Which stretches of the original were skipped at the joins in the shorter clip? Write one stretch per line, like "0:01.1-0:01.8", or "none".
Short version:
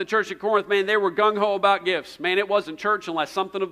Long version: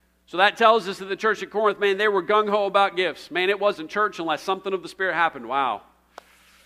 none